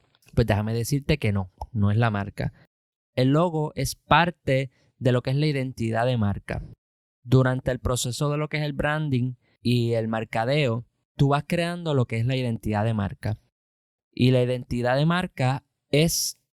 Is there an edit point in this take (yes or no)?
no